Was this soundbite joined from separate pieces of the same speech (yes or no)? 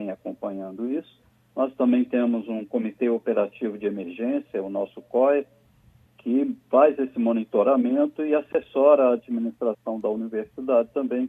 no